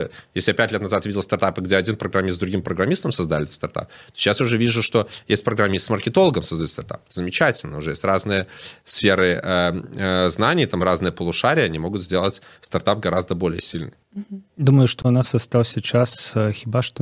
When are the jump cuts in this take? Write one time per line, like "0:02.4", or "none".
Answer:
none

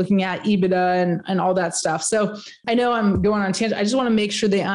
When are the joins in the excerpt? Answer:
0:02.6

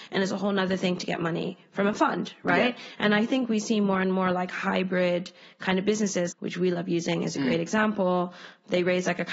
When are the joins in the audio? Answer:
0:06.3

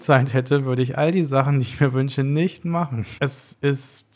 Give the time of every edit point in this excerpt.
0:03.2

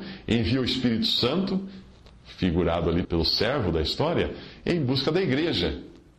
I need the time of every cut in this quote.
0:03.0

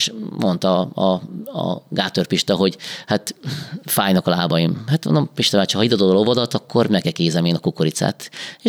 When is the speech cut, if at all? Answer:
none

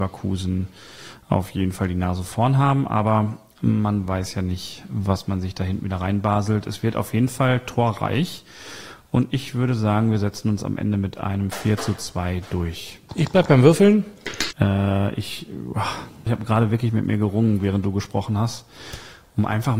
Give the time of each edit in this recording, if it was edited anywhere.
0:13.1
0:14.5
0:16.3

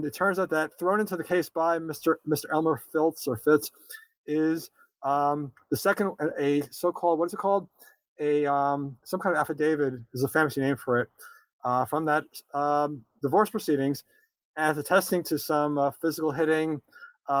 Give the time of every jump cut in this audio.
none

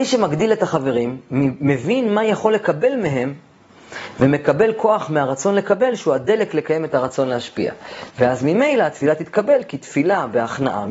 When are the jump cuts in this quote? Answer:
0:08.1

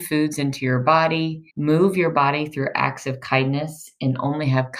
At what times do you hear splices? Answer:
0:01.5

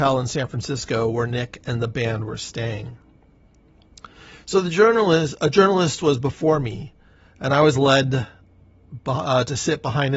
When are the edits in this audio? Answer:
none

